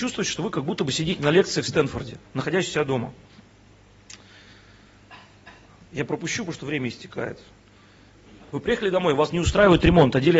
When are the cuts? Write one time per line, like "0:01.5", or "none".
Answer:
0:08.5